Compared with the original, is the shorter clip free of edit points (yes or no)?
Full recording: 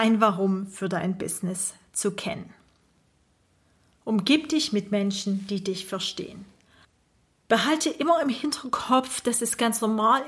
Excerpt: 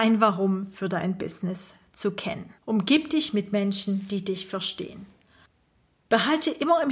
no